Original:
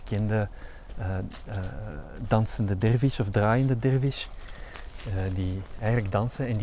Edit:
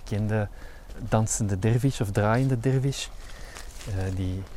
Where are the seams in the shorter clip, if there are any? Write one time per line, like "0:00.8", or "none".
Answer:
0:00.9